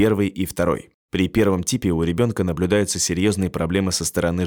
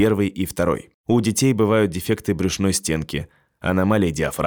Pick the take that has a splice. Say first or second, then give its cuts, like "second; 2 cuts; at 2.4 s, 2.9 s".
second; 1 cut; at 1.0 s